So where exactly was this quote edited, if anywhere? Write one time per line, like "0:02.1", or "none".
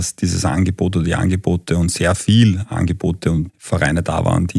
0:03.5